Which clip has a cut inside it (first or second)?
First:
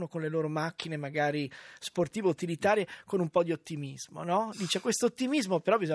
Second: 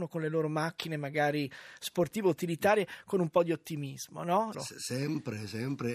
second